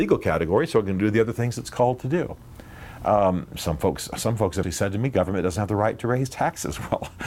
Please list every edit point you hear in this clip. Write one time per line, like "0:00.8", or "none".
0:04.6